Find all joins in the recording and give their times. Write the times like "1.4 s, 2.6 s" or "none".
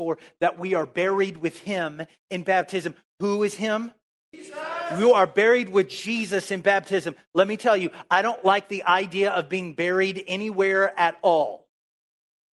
none